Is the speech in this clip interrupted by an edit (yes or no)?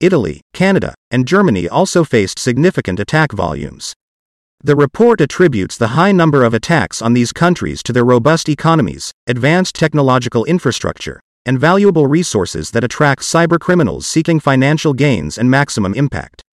no